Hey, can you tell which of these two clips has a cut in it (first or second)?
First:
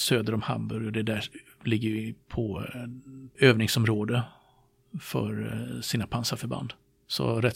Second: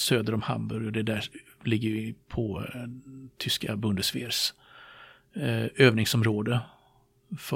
first